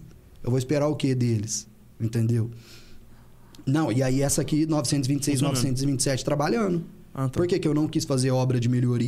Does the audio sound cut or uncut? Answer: uncut